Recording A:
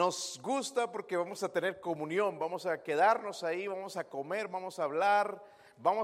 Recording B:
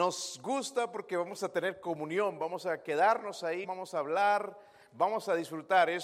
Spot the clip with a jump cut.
B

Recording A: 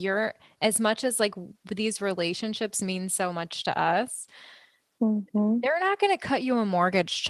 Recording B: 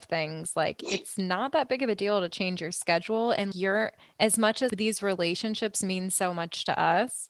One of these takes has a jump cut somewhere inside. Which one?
B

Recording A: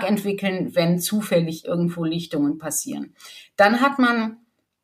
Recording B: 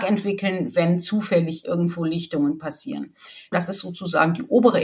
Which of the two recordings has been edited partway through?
B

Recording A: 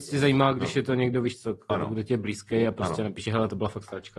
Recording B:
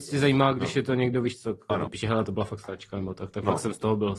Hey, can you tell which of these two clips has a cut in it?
B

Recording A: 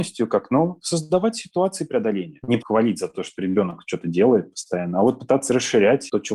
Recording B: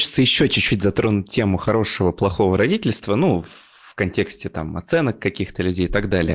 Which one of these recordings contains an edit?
A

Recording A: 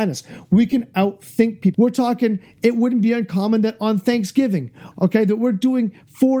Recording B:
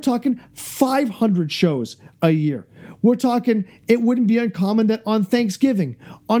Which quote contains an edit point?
A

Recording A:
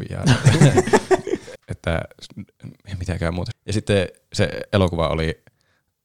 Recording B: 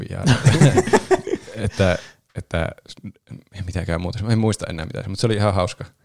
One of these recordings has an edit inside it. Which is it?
A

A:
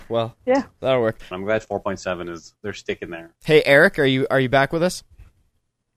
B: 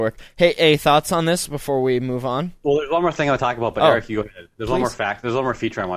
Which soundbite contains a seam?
A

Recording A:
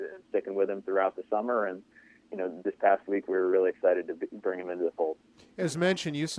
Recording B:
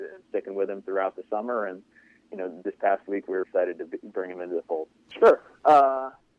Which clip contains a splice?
B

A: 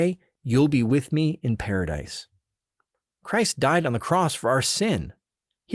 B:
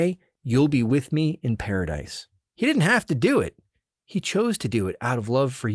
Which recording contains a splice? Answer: B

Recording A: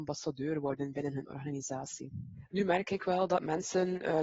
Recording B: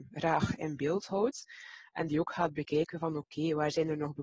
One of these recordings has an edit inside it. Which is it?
A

